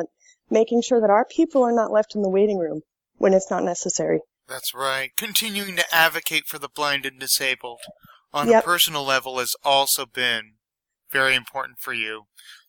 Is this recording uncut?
yes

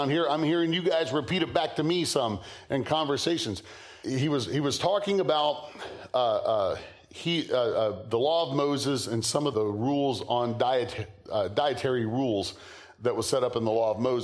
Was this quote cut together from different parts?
yes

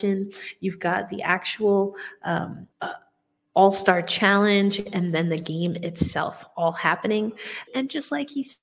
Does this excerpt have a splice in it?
yes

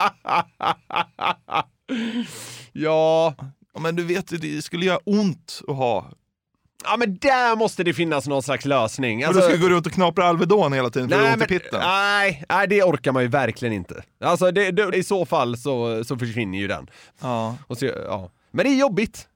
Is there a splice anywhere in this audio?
yes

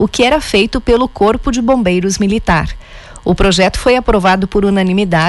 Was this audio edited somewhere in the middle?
no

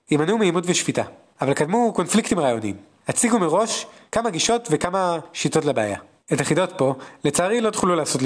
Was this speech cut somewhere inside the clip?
no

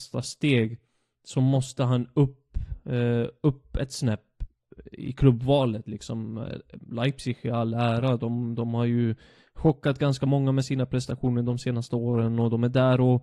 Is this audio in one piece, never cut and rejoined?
yes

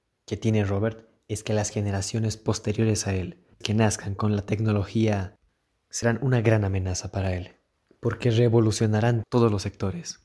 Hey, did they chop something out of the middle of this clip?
yes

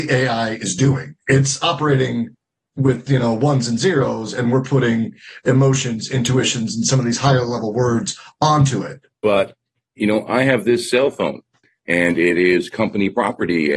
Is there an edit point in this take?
yes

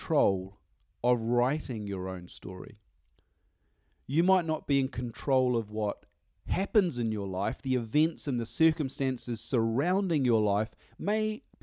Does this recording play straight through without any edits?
yes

